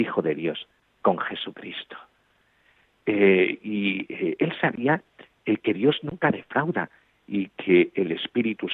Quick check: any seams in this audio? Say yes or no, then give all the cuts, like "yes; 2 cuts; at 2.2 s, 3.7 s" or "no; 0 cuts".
no; 0 cuts